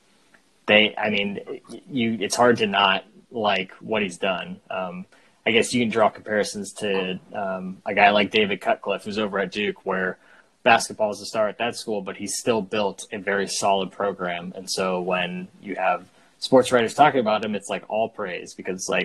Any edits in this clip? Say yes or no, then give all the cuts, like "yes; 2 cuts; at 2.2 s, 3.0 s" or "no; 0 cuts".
no; 0 cuts